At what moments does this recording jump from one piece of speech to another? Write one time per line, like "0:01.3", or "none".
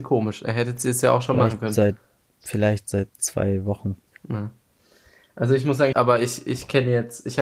0:04.1
0:05.9